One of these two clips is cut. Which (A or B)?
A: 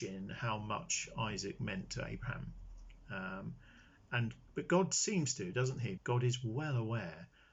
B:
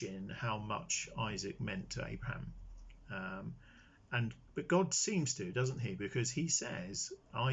A